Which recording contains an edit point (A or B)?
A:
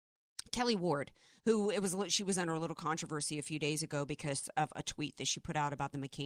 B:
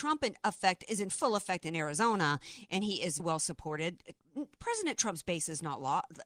B